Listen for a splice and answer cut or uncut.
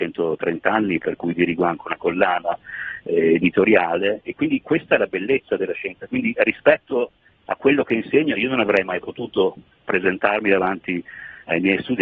uncut